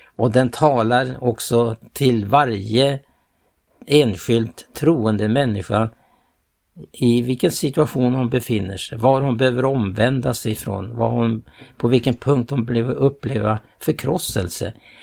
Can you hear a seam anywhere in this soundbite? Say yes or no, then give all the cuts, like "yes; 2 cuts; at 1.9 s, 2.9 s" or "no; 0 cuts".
no; 0 cuts